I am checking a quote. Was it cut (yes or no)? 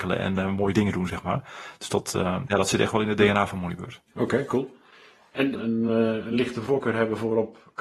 yes